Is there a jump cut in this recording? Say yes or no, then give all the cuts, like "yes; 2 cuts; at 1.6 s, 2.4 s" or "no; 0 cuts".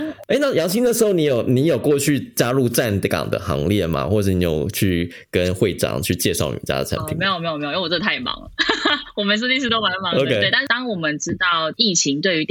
no; 0 cuts